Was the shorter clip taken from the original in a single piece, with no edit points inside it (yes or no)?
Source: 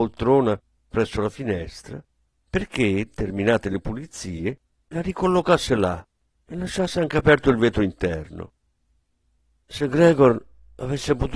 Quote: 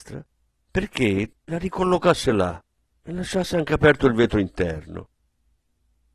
no